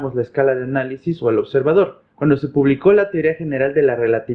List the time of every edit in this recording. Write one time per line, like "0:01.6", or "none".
0:02.1